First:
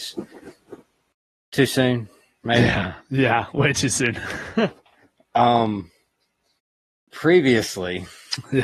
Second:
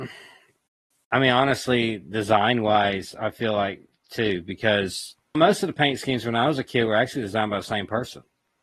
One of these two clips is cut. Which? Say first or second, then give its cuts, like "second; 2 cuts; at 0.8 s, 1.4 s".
second; 1 cut; at 5.3 s